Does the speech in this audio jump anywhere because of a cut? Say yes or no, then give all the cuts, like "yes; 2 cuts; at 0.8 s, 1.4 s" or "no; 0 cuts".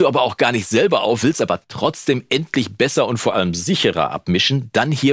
no; 0 cuts